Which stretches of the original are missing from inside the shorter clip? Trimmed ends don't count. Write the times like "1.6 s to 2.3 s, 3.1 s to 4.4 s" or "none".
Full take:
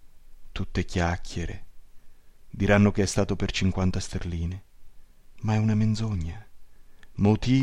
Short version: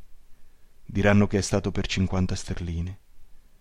none